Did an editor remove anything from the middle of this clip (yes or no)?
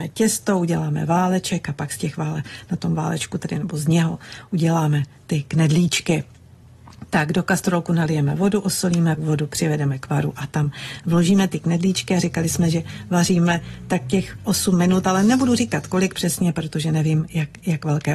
yes